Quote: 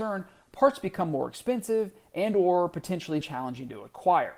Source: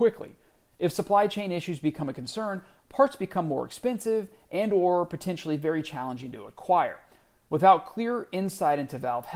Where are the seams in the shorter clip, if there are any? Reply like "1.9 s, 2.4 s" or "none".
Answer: 3.2 s